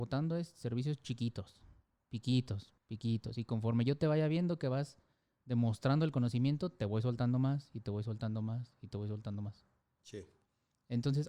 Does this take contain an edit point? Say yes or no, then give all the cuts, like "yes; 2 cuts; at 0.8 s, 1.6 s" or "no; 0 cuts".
yes; 2 cuts; at 2.8 s, 10.0 s